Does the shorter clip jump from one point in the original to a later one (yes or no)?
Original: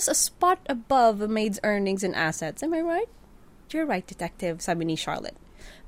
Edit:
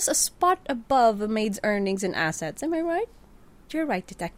no